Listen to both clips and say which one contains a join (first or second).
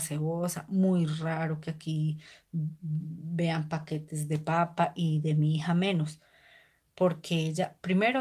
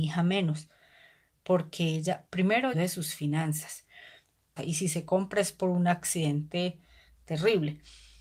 second